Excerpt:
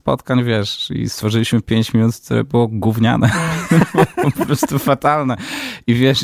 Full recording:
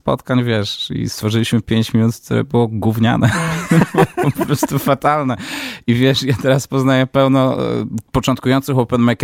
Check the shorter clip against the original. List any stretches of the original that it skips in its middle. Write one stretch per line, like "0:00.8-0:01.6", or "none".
none